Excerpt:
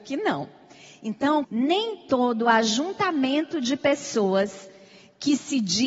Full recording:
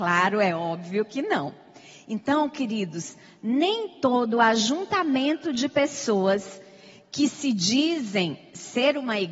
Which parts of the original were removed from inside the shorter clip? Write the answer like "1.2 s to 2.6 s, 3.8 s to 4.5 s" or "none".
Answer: 2.5 s to 3.4 s